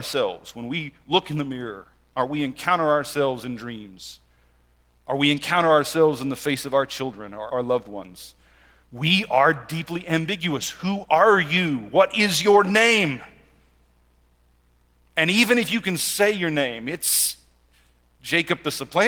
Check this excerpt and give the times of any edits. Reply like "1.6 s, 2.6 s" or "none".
7.5 s